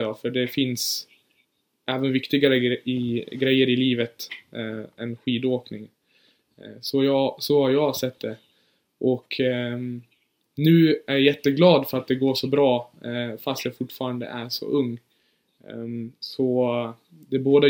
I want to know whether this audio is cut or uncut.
uncut